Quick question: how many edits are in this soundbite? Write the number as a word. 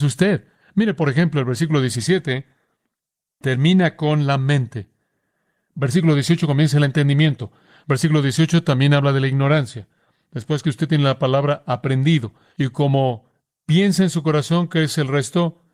two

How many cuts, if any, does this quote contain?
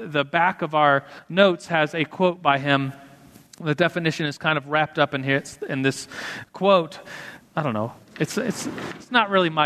one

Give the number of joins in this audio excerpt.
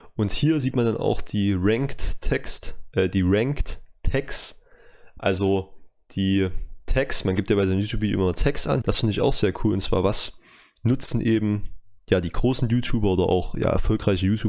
one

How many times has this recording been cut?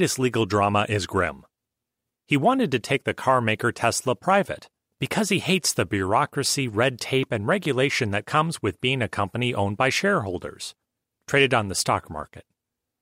zero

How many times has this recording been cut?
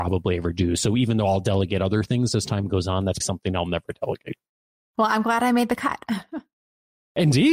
one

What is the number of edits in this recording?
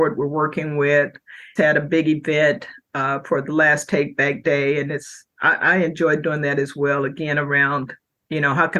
one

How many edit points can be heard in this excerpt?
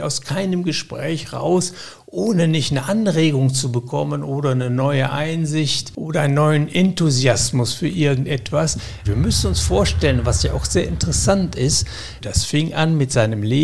two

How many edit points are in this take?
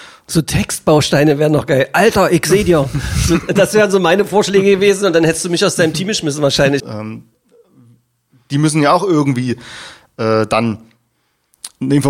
one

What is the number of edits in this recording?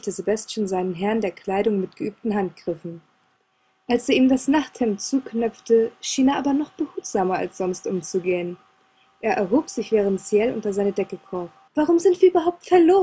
two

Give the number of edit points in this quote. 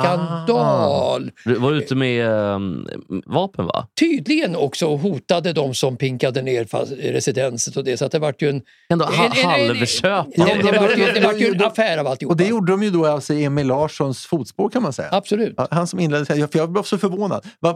one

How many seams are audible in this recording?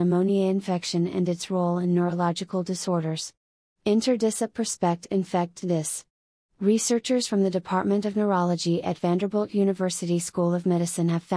one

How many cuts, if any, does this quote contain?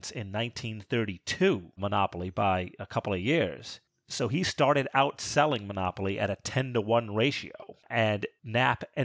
one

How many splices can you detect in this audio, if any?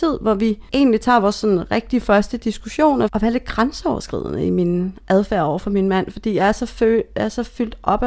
one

